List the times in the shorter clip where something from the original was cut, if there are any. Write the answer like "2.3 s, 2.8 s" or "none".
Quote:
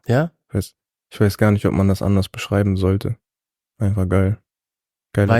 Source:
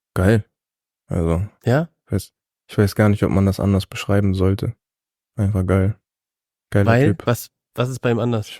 none